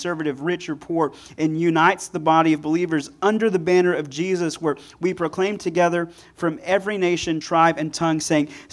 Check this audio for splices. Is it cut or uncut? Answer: uncut